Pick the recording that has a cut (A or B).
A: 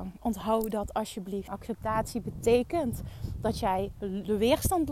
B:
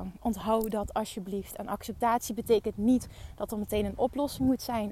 A